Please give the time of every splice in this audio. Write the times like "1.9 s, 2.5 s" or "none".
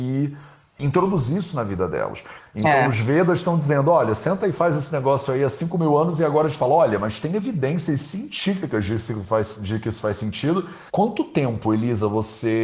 2.4 s, 10.9 s